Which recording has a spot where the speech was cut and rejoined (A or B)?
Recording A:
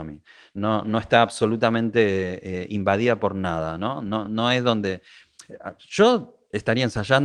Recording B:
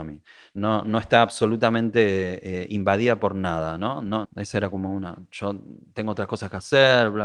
B